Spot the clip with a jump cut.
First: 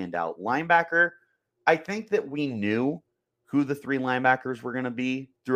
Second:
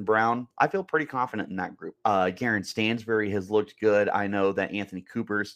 second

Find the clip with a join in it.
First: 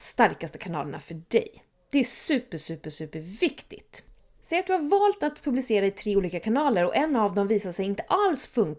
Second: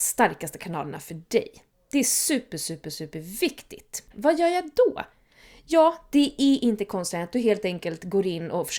second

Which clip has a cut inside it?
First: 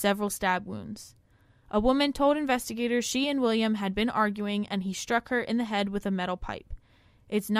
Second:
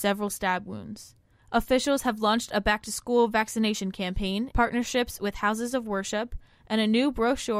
second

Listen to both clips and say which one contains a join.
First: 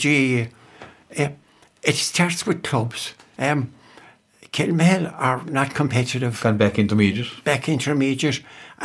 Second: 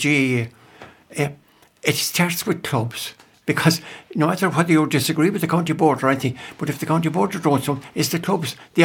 first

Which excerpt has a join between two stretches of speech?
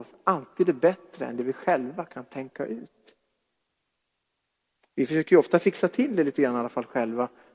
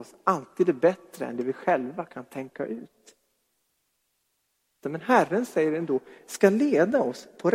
second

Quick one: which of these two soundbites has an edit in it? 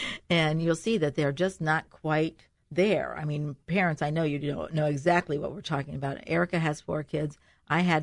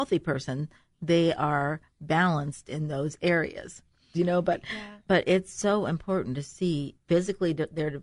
second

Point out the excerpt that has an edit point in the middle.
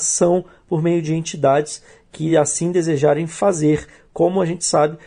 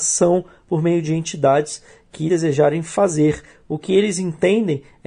second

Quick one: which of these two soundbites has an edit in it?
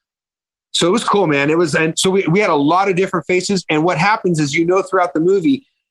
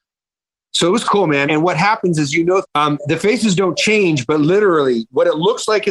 second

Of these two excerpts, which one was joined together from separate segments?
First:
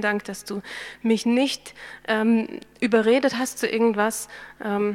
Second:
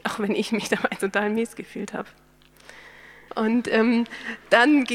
second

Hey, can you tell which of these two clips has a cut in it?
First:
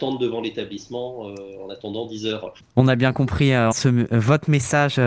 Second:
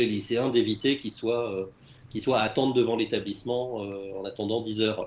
first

